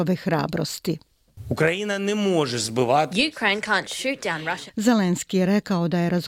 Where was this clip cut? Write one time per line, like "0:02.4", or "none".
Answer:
0:04.7